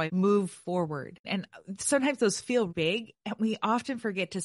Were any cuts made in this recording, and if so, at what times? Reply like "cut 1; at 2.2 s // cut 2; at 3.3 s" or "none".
cut 1; at 1.2 s // cut 2; at 2.7 s